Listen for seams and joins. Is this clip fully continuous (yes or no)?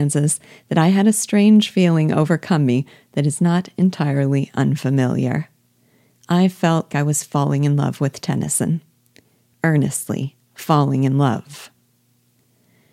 no